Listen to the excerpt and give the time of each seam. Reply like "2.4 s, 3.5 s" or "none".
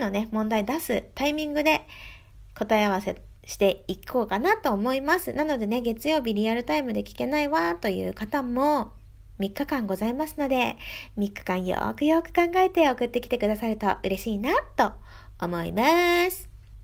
none